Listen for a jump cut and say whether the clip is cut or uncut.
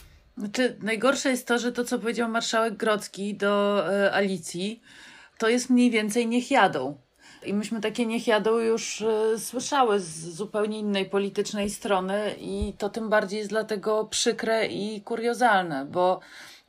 uncut